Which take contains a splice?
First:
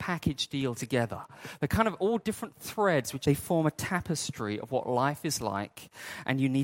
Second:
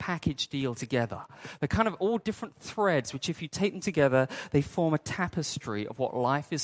first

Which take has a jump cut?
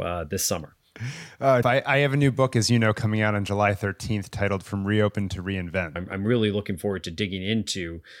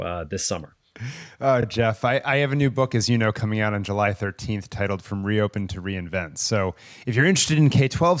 first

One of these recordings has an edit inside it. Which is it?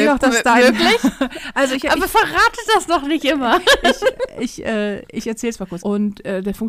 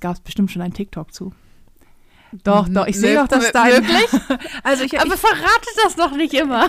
first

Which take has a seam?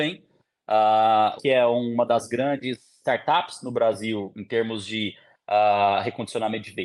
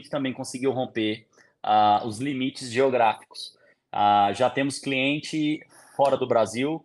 first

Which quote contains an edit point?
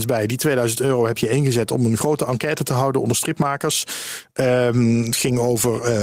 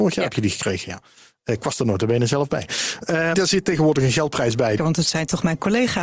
second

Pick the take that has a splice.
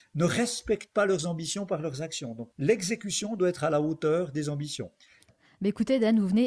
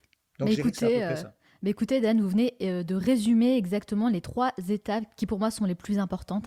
first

